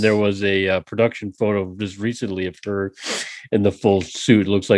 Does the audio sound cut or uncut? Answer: uncut